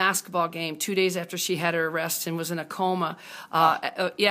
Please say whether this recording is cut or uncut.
uncut